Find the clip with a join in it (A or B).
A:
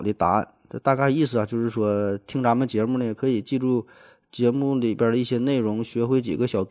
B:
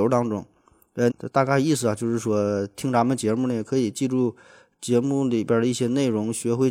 B